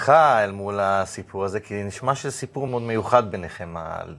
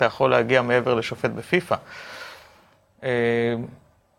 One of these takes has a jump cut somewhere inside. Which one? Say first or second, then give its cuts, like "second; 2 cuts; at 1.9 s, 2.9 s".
first; 1 cut; at 2.7 s